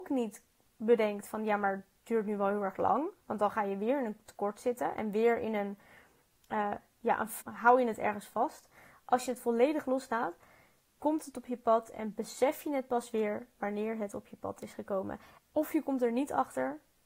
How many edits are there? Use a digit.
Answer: 2